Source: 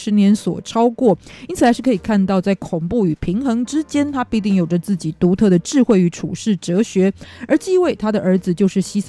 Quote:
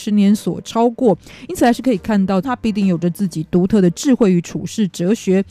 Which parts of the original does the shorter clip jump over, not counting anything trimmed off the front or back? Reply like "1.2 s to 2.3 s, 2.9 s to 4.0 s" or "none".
2.4 s to 4.1 s